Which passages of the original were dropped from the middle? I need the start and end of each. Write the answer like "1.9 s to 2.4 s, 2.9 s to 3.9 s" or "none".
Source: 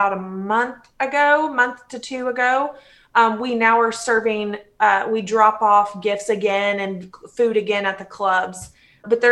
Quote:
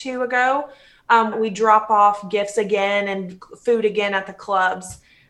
3.4 s to 5.0 s